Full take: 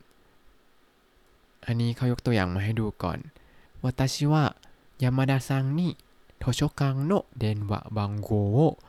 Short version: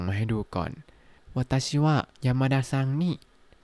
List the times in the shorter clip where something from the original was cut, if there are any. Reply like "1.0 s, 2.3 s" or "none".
2.1 s